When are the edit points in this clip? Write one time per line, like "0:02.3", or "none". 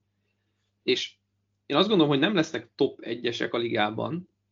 none